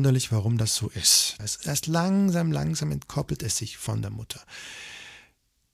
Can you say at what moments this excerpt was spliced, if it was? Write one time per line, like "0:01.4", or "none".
0:01.4